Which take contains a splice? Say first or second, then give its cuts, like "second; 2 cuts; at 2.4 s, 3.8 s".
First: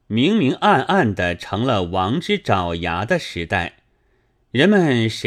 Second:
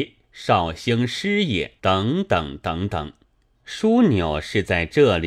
second; 2 cuts; at 1.8 s, 3.5 s